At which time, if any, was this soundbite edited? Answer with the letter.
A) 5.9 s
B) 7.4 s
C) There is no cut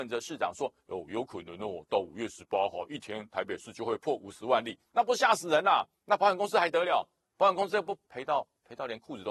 C